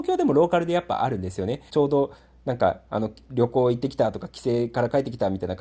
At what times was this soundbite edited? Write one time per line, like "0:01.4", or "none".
0:01.7